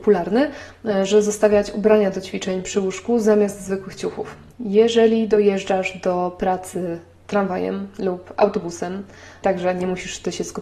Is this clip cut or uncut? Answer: cut